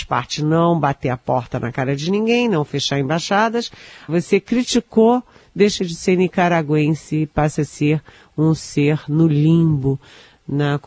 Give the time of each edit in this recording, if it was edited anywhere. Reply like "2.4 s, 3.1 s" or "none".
4.1 s